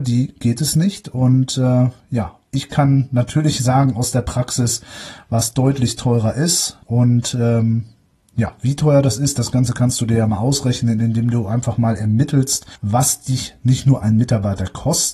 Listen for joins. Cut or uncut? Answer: cut